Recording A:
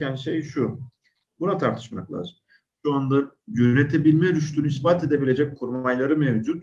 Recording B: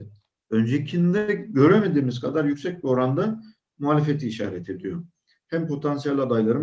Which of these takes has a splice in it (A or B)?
A